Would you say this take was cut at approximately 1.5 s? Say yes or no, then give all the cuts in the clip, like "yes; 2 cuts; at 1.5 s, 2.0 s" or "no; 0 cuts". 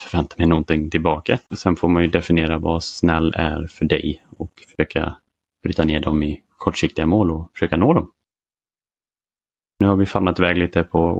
yes; 1 cut; at 1.5 s